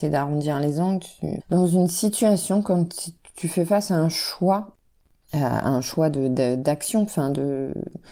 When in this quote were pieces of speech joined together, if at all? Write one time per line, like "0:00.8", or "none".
0:01.4